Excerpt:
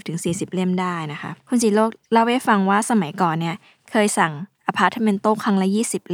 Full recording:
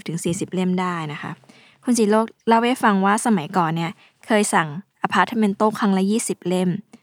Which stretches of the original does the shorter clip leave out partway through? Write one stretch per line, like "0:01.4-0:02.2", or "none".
0:01.4-0:01.8